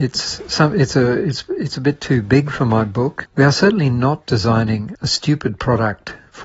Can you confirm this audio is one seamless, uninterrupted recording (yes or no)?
no